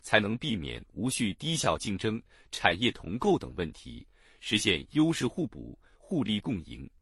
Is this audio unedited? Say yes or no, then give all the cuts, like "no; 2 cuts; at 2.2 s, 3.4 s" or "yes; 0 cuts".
yes; 0 cuts